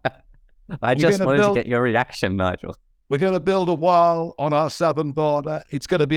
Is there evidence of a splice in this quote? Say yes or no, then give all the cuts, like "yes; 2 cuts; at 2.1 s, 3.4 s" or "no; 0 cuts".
no; 0 cuts